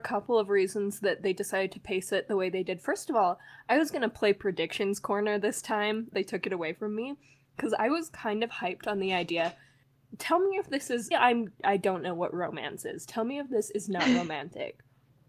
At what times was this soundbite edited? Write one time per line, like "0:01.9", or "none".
0:06.1
0:11.1